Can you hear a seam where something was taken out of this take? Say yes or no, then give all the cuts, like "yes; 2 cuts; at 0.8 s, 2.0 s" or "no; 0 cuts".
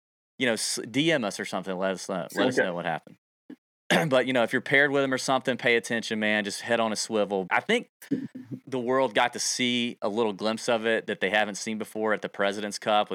yes; 3 cuts; at 3.6 s, 7.5 s, 8.6 s